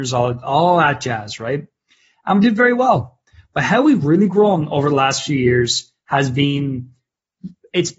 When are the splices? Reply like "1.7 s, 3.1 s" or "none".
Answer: none